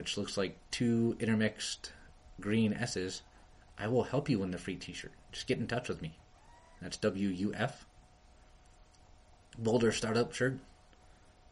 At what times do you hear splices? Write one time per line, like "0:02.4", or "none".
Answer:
0:06.8